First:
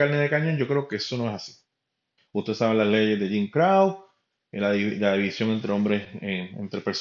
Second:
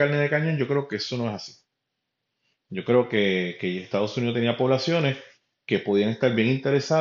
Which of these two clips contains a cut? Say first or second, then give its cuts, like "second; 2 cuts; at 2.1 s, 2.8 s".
first; 1 cut; at 2.2 s